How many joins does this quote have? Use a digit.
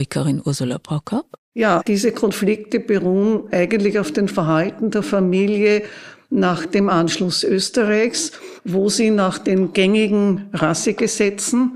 0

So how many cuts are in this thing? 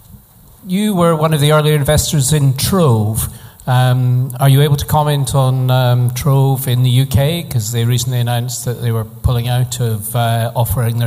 0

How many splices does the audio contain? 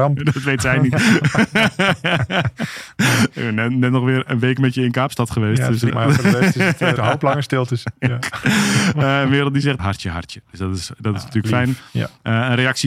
3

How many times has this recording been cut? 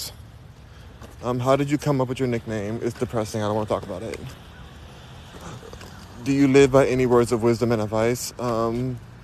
0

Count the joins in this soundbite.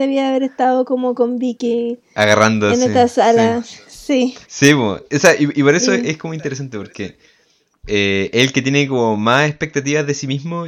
1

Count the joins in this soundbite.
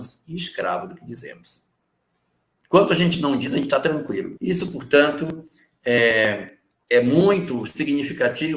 1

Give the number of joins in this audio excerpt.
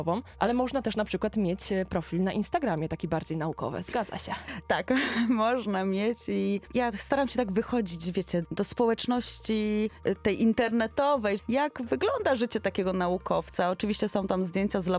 2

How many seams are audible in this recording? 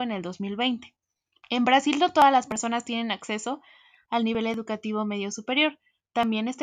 1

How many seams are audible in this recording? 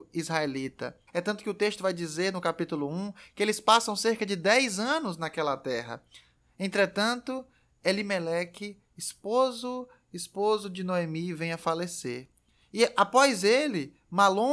1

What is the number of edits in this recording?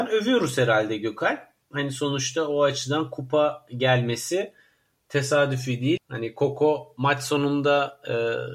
1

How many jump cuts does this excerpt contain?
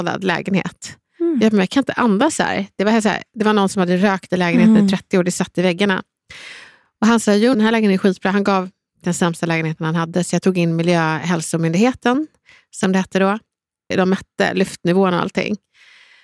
2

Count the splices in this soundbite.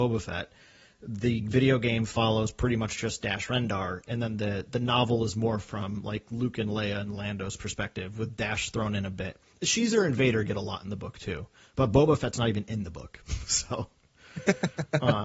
0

